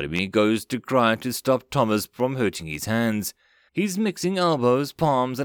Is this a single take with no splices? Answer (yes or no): no